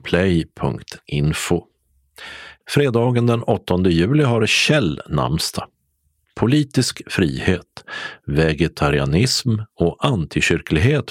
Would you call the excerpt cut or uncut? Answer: uncut